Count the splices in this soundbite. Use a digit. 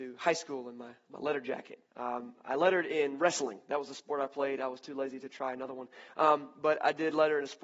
1